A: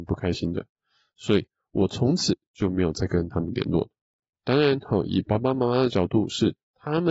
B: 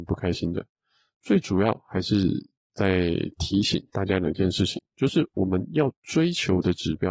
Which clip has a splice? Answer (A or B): A